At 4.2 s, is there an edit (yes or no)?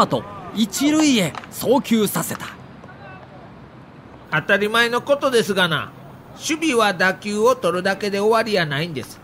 no